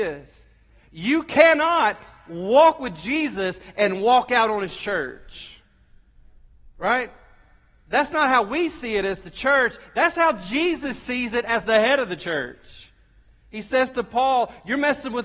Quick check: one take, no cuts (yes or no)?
yes